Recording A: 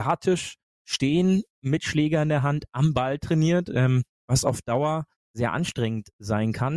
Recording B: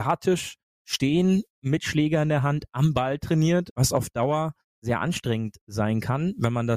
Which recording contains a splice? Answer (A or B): B